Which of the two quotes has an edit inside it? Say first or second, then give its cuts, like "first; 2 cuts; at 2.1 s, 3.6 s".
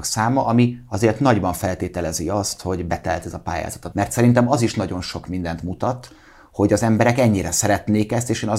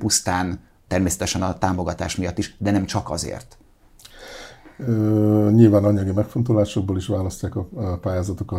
first; 1 cut; at 3.9 s